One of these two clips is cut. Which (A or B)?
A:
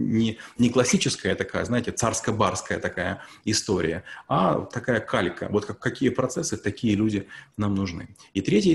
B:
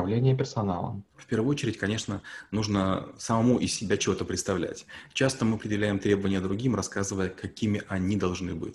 B